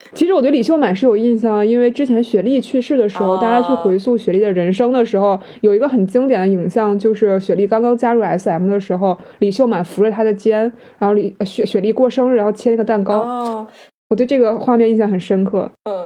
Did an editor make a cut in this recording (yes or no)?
no